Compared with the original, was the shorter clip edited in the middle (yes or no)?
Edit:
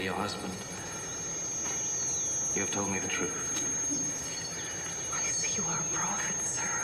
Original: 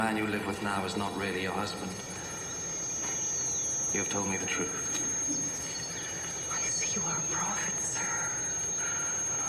no